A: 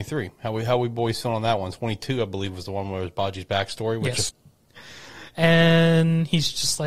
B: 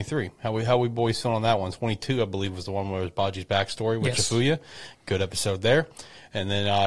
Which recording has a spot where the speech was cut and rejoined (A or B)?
A